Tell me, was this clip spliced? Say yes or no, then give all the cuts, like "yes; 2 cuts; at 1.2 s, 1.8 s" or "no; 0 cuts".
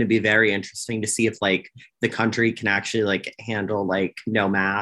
no; 0 cuts